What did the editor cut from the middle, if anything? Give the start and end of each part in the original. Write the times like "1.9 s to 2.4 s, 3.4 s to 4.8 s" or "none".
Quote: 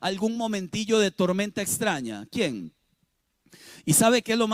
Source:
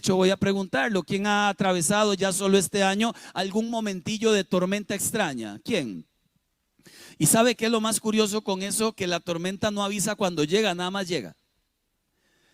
none